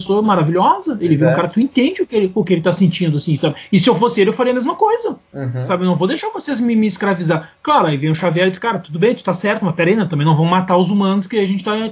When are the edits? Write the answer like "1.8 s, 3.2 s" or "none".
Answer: none